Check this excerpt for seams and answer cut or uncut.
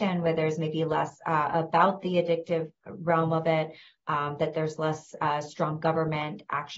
uncut